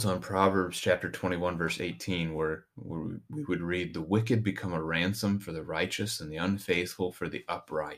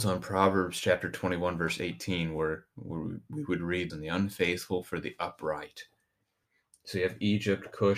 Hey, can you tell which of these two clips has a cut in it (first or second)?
second